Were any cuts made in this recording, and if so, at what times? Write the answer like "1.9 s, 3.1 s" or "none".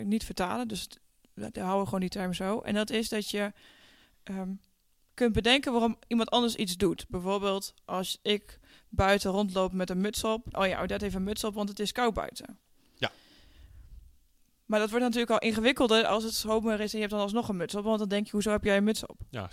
10.5 s